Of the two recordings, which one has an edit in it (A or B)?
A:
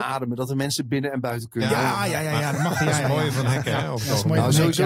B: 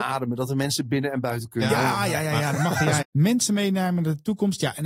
B